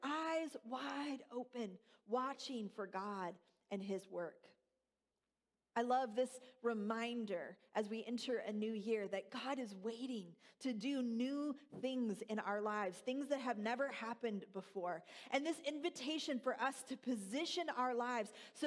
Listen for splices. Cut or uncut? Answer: cut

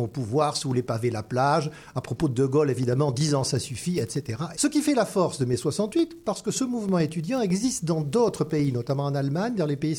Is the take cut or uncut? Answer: cut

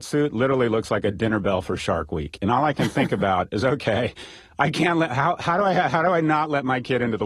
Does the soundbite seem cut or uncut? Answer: uncut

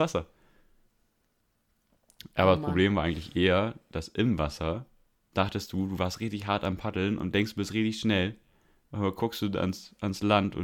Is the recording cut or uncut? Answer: uncut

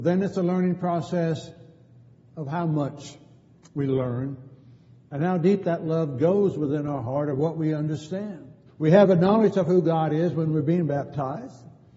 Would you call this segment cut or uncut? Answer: cut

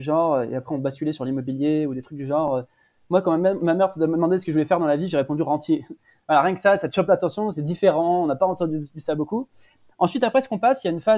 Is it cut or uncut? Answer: uncut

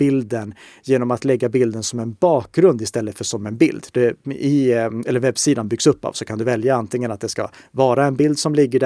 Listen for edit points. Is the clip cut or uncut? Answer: cut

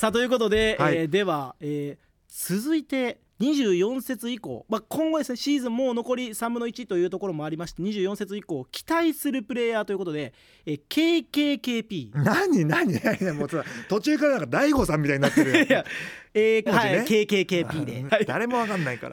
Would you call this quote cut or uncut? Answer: cut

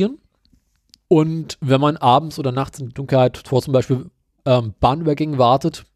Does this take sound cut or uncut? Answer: cut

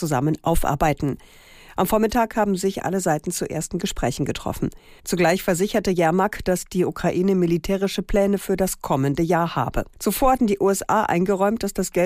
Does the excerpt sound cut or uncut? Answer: cut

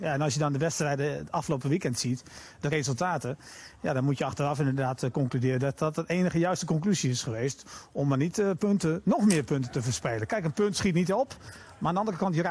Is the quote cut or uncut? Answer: uncut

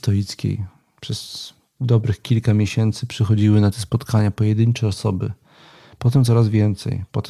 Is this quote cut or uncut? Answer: uncut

